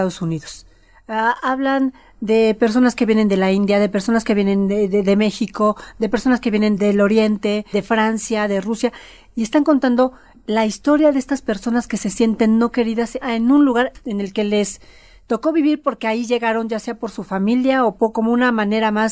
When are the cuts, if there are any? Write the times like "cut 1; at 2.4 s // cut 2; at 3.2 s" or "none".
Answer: none